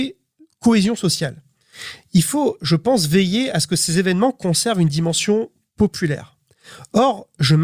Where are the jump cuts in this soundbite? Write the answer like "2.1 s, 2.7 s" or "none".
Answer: none